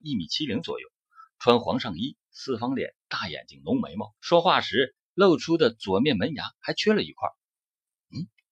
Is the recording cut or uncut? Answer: cut